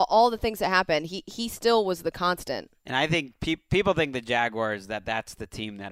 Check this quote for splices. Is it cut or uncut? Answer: uncut